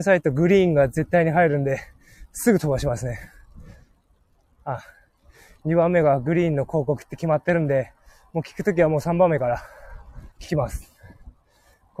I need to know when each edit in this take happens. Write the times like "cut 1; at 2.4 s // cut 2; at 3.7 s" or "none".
cut 1; at 5.6 s // cut 2; at 10.3 s